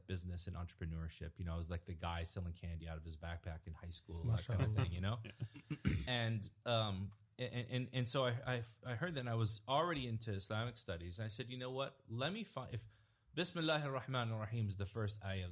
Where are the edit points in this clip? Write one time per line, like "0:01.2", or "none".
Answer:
none

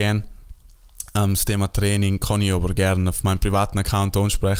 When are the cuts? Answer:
none

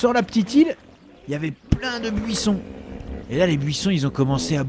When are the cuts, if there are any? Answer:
none

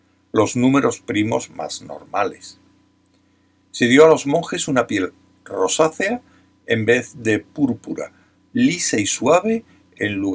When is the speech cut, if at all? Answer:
none

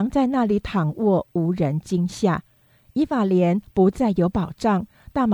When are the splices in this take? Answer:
none

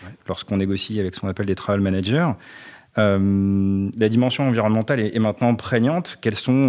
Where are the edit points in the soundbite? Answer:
none

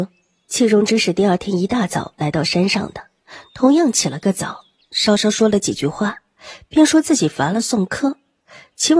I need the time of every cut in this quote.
0:04.8

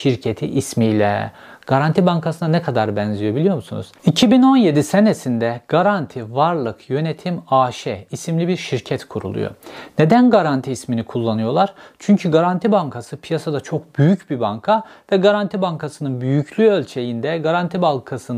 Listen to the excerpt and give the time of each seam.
0:04.0

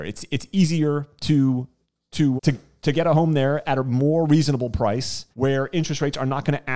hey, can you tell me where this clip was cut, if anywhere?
0:02.4
0:05.3

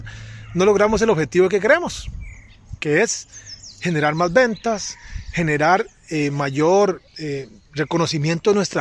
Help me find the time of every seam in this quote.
0:07.1

